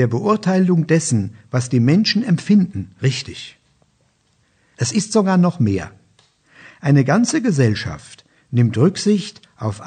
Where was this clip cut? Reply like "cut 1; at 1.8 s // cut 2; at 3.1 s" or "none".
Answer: cut 1; at 4.7 s